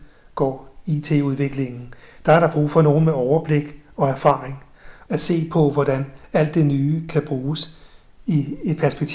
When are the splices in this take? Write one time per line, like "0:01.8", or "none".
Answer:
0:05.1